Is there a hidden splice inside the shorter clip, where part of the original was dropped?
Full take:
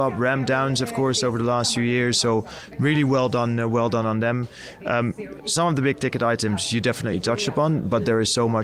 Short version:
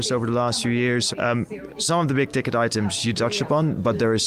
yes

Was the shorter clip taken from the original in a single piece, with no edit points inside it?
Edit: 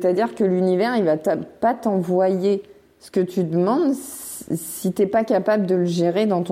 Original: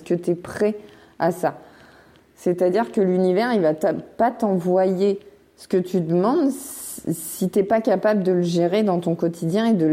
yes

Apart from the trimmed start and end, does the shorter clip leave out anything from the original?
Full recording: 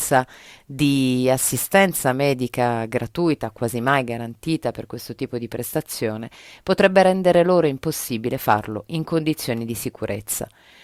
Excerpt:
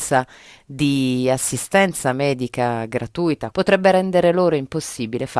yes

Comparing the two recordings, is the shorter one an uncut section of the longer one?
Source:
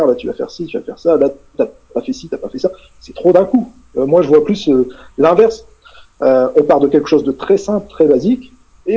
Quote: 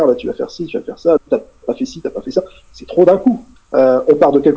no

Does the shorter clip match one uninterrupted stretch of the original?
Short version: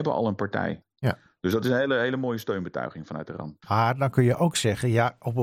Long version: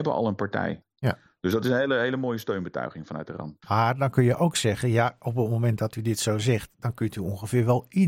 yes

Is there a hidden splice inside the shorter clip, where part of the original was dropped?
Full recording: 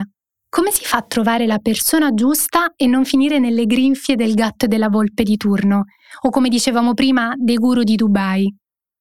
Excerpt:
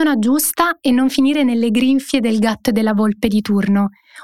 no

